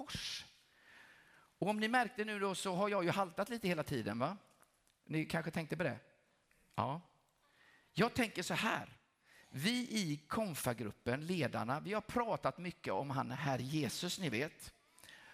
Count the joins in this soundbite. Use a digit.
0